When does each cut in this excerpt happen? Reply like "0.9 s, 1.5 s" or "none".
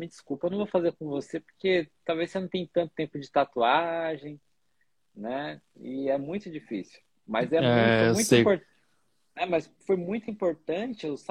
none